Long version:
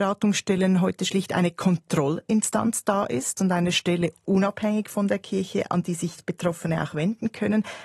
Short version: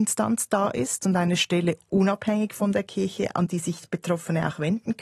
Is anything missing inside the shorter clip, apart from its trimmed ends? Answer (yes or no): no